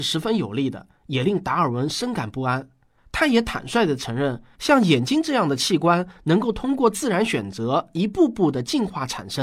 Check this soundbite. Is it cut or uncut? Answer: cut